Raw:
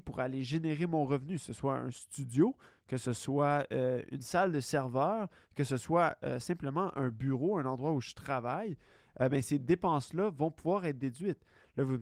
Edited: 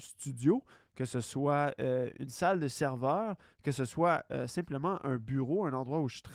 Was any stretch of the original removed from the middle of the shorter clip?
no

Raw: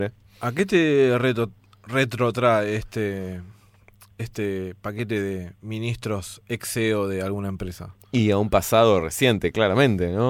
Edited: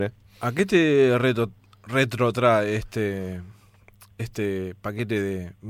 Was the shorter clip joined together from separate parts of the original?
no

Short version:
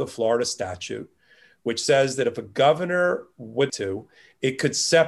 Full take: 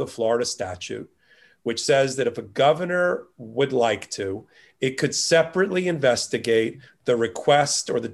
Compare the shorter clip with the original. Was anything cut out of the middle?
yes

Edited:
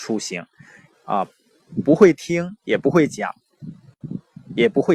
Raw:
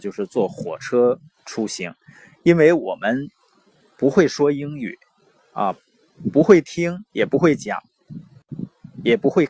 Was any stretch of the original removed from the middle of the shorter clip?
yes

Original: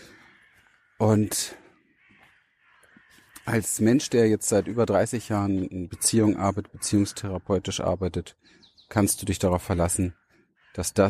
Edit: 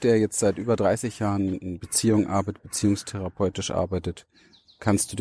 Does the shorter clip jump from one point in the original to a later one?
no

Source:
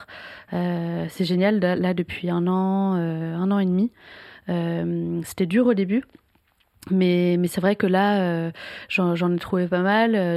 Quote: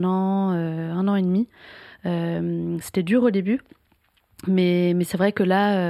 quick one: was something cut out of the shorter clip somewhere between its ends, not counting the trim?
no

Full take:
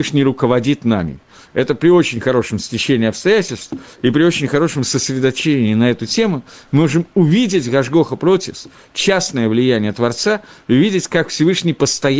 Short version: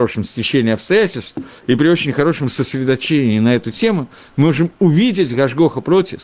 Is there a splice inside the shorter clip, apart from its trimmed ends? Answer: no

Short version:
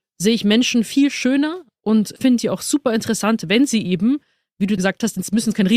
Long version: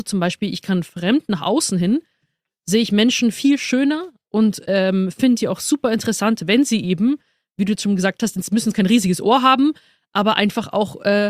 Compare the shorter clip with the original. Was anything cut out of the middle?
yes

